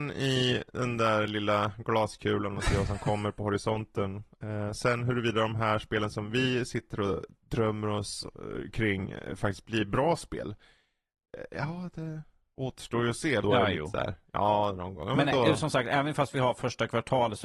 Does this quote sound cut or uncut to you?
cut